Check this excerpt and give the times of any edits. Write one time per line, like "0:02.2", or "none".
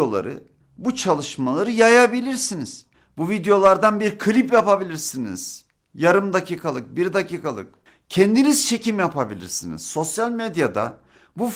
none